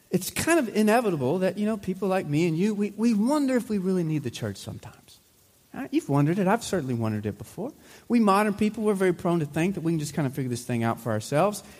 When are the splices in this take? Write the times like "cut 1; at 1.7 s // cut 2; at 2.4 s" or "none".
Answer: none